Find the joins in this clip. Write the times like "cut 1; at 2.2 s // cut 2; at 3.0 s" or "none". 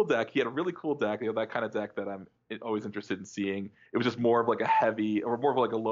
none